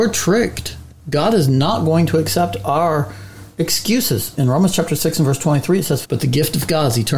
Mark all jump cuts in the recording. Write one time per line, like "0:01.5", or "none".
0:06.0